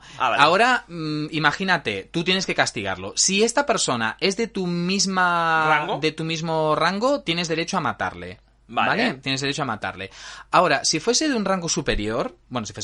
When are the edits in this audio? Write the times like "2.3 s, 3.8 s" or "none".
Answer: none